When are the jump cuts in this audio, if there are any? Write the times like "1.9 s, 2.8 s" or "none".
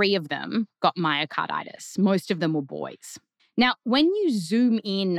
3.4 s